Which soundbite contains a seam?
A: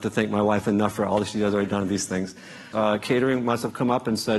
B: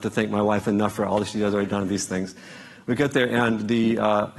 A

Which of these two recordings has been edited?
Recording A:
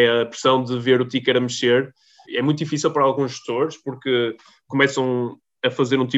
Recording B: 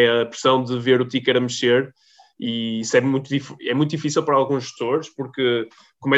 A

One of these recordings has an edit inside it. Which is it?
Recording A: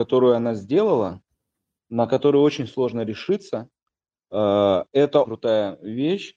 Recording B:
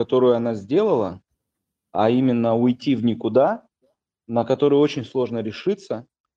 A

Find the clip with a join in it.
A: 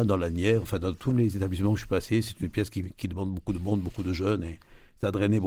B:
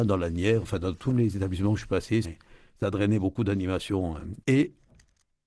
B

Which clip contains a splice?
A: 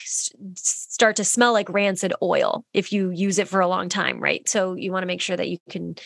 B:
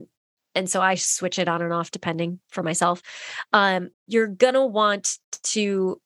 B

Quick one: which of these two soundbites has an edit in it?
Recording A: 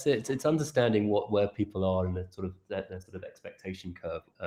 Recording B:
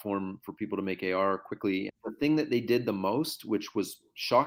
B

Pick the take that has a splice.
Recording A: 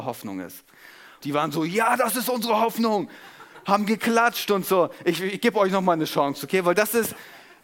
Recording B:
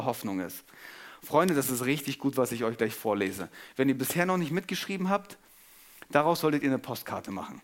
A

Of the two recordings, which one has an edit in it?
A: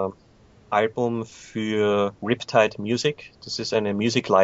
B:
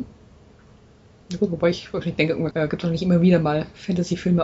B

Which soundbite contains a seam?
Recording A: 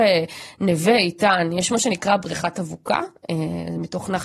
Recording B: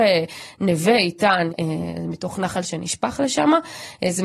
B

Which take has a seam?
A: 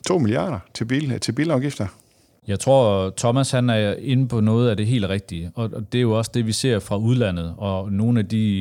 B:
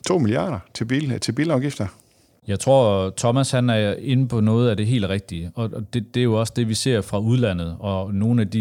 A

